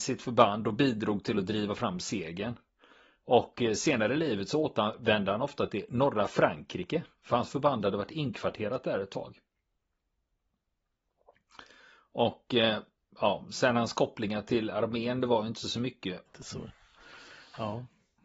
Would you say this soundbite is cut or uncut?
cut